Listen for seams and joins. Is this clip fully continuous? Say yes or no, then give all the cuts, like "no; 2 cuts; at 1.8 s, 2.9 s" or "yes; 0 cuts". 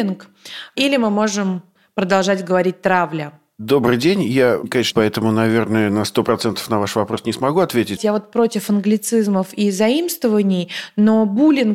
no; 2 cuts; at 4.9 s, 8.0 s